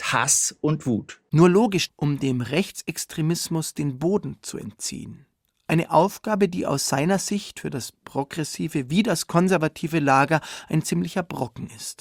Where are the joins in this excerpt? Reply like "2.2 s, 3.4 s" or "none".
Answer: 1.9 s